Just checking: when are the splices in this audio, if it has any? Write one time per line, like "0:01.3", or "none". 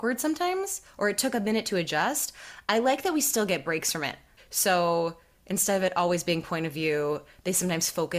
0:04.4